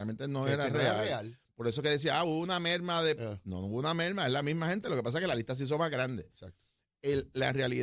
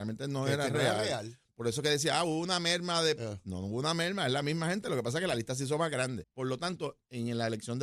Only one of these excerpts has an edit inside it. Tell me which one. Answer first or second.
second